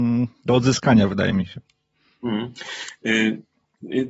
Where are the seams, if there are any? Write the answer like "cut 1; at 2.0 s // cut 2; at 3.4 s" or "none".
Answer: none